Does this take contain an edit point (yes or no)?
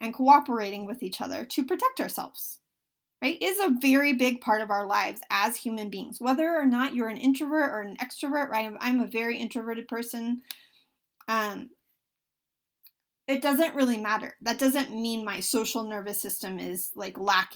no